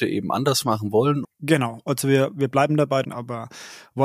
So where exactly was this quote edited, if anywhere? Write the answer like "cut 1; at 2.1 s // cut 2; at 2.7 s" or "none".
cut 1; at 1.2 s // cut 2; at 3.0 s

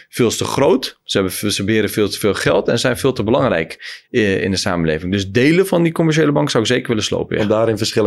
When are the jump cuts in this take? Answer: none

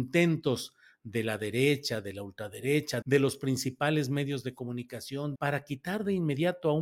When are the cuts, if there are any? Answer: cut 1; at 3.0 s // cut 2; at 5.4 s

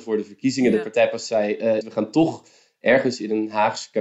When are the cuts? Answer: cut 1; at 1.8 s

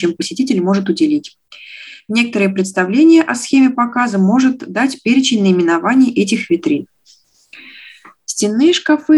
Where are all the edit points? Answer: none

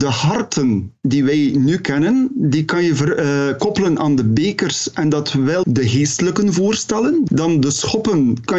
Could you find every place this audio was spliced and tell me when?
cut 1; at 5.6 s

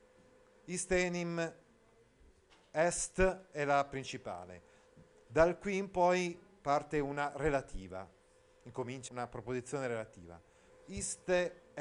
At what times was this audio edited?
cut 1; at 9.1 s // cut 2; at 10.7 s

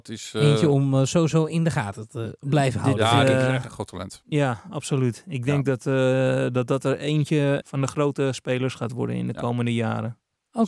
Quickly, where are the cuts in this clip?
cut 1; at 7.6 s

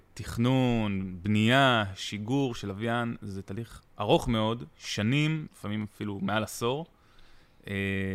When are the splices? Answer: cut 1; at 3.9 s // cut 2; at 5.5 s

